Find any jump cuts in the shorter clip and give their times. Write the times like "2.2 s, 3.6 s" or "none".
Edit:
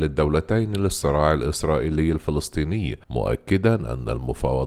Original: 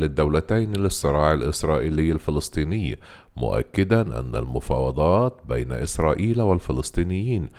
3.0 s